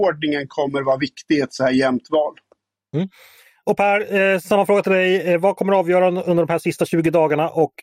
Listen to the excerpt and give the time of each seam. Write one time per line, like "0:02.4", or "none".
none